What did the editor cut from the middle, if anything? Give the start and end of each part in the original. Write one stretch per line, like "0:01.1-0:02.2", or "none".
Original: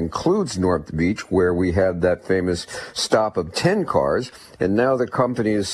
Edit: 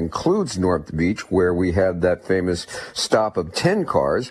none